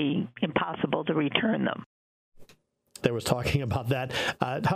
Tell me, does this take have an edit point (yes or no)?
yes